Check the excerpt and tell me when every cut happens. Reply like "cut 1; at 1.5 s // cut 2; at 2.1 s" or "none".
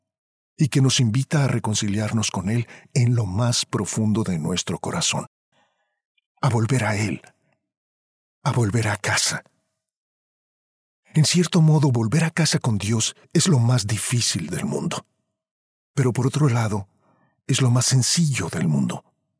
none